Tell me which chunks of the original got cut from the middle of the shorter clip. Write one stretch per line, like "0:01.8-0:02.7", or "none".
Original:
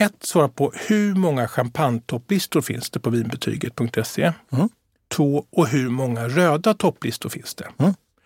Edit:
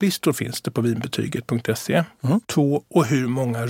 0:04.7-0:05.1